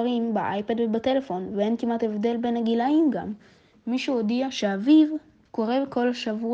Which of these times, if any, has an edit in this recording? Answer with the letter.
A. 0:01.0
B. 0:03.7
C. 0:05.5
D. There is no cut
C